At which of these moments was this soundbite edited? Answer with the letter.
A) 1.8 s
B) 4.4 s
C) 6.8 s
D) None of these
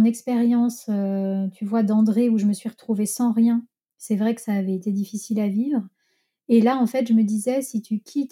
D